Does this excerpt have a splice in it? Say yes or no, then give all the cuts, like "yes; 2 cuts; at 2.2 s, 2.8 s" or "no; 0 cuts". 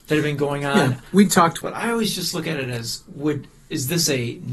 yes; 1 cut; at 1.6 s